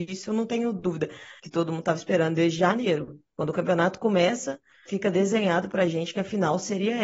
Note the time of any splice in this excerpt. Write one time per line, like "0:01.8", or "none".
0:01.4
0:04.9